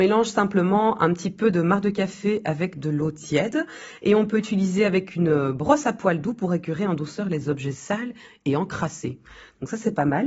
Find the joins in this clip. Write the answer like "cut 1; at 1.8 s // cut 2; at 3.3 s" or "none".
none